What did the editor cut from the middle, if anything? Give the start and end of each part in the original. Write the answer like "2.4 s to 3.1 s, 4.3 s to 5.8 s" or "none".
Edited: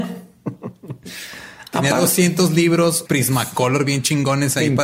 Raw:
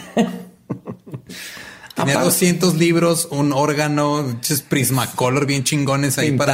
3.3 s to 4.7 s